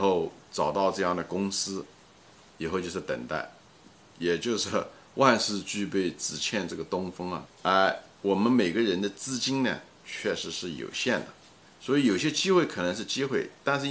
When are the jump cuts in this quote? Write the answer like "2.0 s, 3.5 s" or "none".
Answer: 7.5 s, 11.7 s